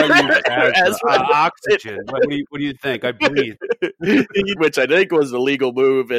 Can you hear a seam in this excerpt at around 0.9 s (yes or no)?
no